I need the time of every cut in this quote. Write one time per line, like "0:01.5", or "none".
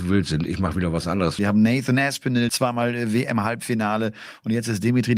0:01.4
0:02.5

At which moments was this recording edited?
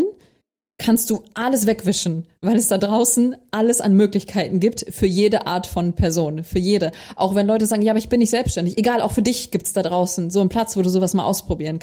none

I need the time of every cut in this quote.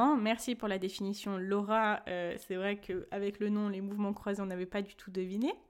none

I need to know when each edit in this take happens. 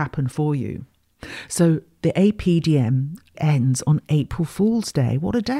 0:03.3

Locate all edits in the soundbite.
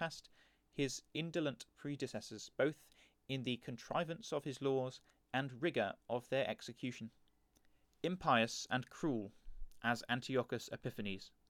0:07.8

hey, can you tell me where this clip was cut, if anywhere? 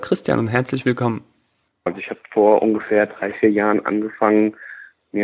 0:01.9

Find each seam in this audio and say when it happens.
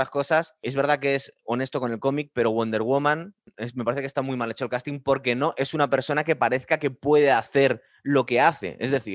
none

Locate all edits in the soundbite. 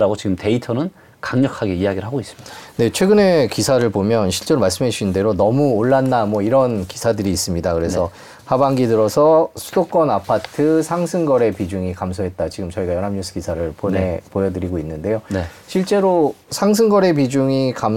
none

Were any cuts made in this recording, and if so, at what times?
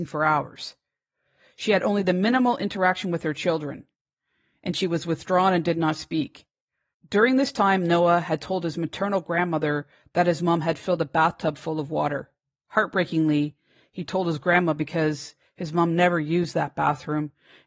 0:06.9

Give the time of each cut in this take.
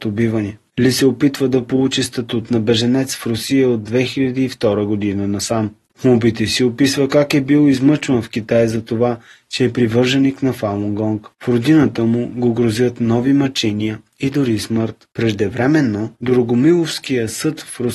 0:05.9

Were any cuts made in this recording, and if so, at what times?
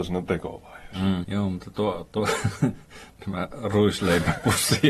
0:01.2

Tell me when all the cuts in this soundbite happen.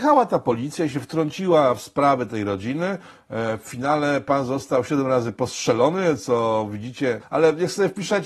0:07.2

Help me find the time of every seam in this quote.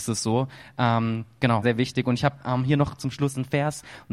0:01.6

